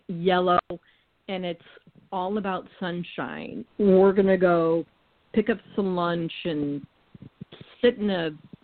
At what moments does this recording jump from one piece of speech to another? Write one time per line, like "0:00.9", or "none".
0:03.7
0:05.3